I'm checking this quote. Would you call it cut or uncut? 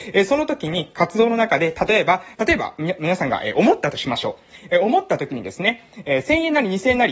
cut